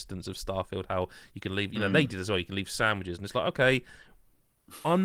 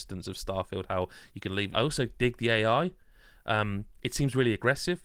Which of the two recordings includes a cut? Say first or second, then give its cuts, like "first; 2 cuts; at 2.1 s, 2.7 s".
second; 1 cut; at 1.7 s